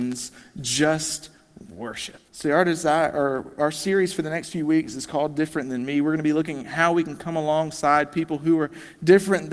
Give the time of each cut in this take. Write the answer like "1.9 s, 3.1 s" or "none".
2.3 s